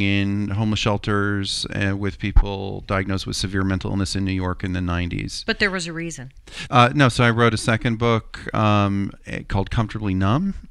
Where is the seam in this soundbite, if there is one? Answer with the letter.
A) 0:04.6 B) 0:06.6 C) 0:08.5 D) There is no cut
B